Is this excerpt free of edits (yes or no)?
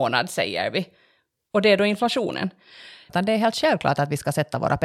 no